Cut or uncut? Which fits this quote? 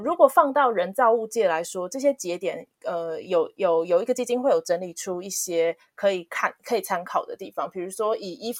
uncut